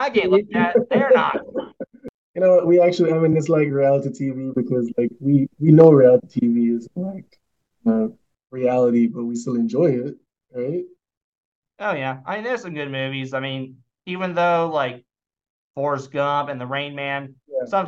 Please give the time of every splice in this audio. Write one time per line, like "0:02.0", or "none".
none